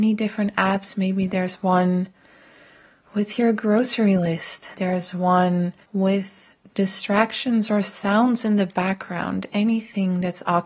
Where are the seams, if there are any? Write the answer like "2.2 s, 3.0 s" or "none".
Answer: 4.7 s, 5.8 s